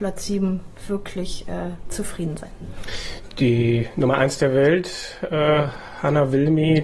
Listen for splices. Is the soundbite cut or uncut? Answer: uncut